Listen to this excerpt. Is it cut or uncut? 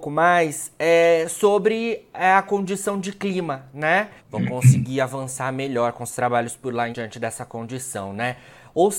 cut